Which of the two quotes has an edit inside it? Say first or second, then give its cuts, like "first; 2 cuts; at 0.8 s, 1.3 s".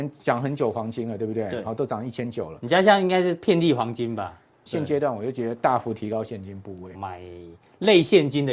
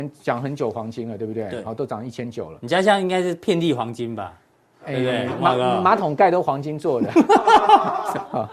first; 2 cuts; at 4.7 s, 6.9 s